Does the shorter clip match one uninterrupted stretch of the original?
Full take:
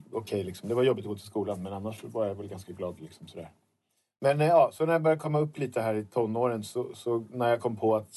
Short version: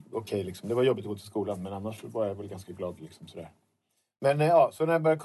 yes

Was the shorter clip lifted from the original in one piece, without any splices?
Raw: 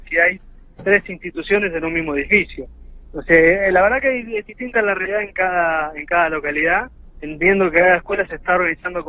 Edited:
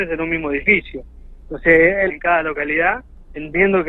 no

